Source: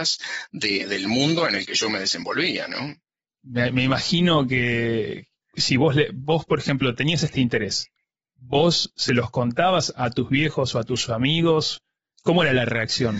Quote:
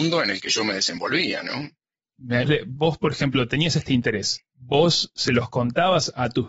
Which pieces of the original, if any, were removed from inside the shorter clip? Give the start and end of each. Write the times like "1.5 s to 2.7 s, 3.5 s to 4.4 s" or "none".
3.7 s to 5.9 s, 7.9 s to 8.3 s